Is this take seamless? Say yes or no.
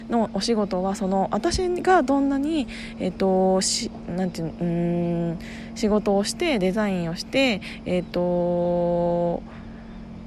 yes